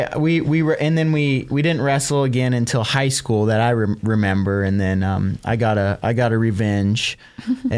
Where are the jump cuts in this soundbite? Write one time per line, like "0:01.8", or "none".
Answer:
none